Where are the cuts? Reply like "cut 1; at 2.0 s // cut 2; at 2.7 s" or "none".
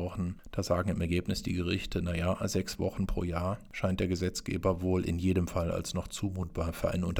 none